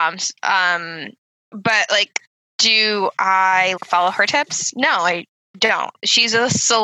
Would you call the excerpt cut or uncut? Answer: cut